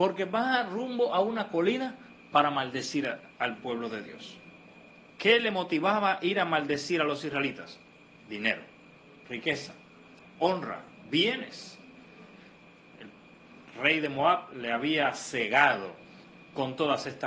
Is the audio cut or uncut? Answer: uncut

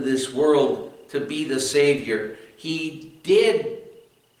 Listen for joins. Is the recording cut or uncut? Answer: uncut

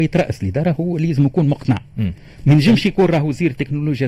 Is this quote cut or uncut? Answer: uncut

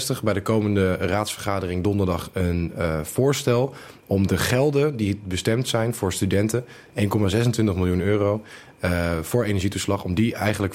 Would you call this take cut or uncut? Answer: uncut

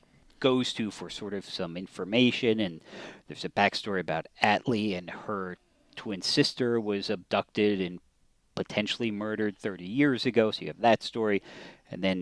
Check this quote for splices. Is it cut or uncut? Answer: uncut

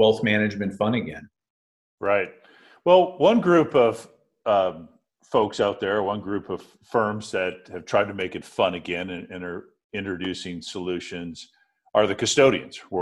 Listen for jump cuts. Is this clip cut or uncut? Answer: uncut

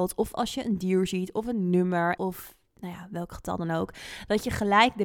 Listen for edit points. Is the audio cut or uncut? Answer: cut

